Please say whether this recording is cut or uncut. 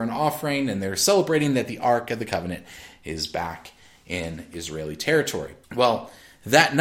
cut